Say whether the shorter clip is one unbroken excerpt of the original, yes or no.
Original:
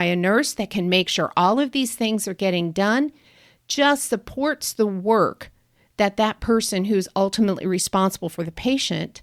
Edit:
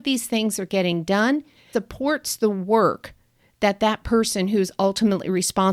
no